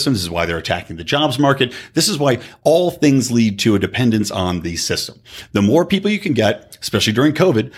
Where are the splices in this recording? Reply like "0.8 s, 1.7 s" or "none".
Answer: none

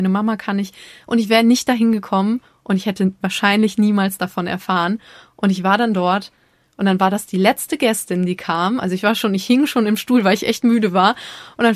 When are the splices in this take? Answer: none

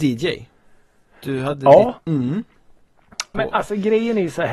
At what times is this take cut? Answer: 2.0 s, 3.3 s

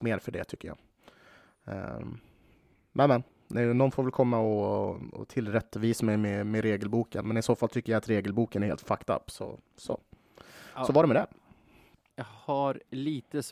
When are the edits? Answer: 12.1 s

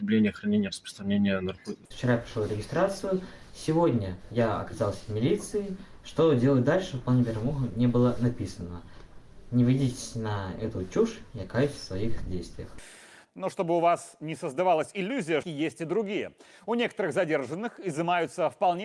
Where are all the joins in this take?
1.9 s, 15.4 s

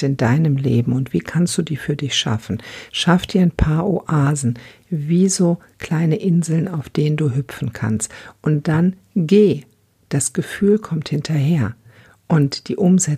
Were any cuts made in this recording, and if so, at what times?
none

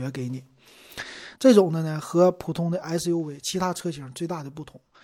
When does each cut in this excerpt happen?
1.4 s

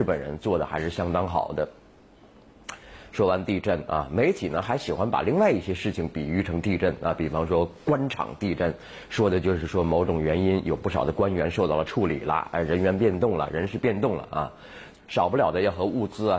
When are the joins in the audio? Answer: 14.9 s

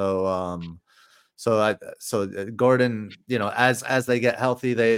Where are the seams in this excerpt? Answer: none

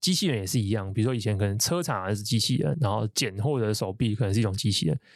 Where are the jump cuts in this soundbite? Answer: 2.7 s

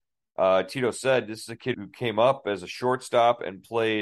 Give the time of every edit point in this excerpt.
1.7 s

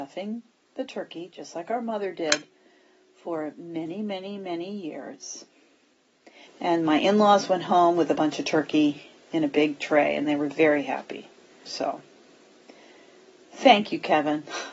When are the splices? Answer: 6.5 s, 11.7 s

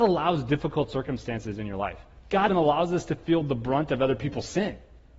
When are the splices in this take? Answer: 2.5 s

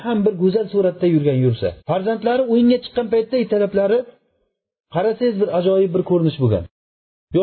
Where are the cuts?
1.8 s

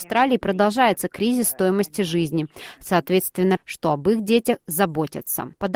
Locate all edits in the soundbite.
3.6 s

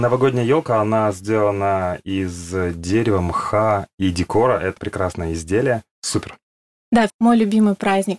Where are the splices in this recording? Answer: 4.8 s, 7.1 s

